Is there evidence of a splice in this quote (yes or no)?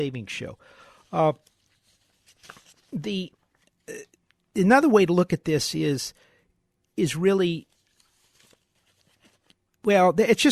no